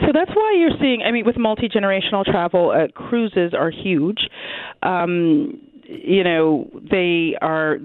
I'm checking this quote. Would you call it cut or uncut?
uncut